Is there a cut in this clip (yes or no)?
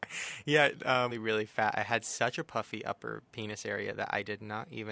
yes